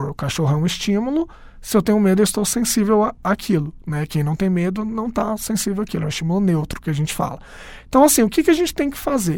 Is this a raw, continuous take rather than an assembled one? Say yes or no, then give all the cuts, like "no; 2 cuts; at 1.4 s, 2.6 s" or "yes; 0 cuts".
yes; 0 cuts